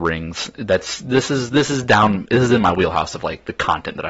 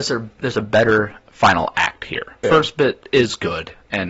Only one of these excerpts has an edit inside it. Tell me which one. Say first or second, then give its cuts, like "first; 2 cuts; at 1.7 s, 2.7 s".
second; 1 cut; at 2.4 s